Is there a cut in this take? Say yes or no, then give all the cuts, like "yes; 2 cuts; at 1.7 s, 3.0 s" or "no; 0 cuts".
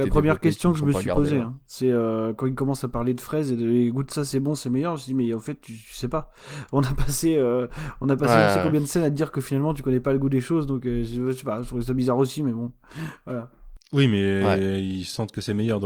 no; 0 cuts